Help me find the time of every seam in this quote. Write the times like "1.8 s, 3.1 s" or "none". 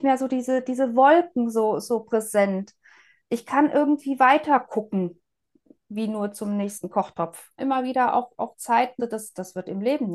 7.6 s, 9.0 s